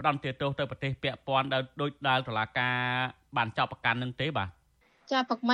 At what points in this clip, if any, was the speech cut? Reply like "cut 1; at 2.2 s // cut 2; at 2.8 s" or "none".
none